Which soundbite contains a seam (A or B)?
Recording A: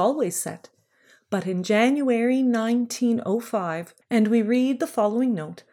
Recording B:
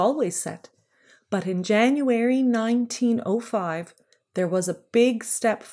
A